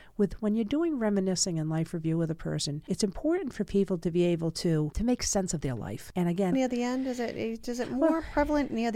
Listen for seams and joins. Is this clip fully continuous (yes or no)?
no